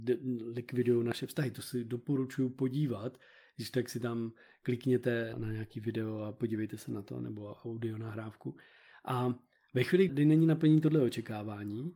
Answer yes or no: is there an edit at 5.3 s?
yes